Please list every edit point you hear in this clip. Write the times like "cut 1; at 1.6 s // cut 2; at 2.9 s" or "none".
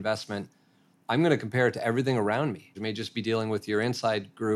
cut 1; at 2.7 s